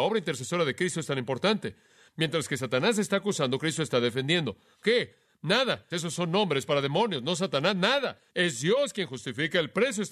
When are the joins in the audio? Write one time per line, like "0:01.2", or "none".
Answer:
0:04.8
0:05.9
0:08.3